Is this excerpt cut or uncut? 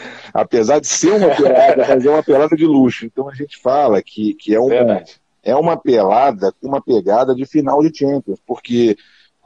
cut